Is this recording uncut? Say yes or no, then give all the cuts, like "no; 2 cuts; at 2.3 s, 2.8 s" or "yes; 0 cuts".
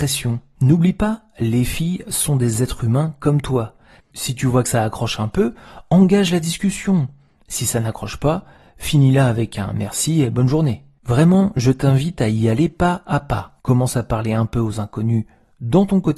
no; 1 cut; at 4.0 s